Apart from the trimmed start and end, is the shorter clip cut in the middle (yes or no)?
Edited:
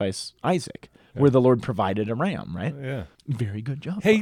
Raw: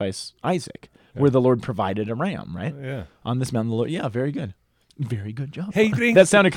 yes